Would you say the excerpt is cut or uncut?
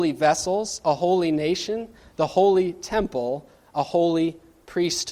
uncut